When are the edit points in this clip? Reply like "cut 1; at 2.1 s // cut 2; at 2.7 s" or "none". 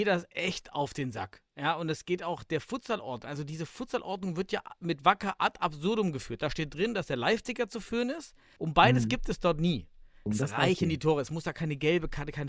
cut 1; at 8.6 s // cut 2; at 10.3 s